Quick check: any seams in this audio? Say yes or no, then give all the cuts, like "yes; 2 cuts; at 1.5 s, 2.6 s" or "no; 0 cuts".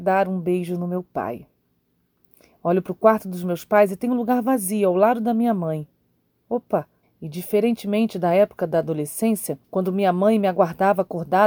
yes; 2 cuts; at 7.0 s, 9.6 s